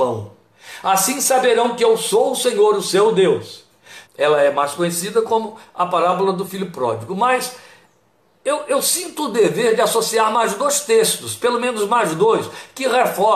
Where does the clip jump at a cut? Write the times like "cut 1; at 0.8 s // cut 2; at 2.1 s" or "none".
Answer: cut 1; at 4.0 s